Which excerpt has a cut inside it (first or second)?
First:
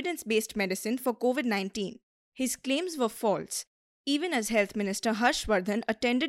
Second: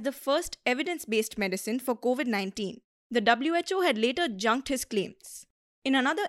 second